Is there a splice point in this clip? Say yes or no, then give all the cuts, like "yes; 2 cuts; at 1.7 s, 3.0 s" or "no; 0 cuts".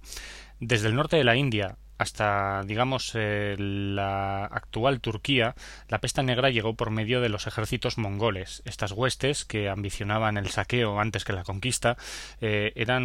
no; 0 cuts